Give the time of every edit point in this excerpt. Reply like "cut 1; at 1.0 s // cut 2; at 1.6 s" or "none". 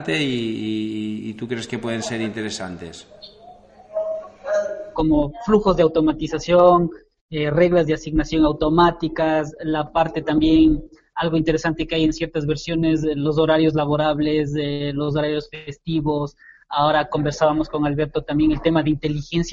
cut 1; at 4.9 s